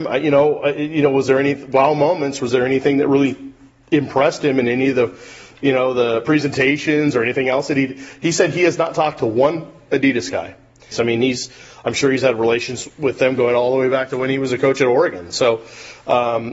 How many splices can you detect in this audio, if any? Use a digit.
1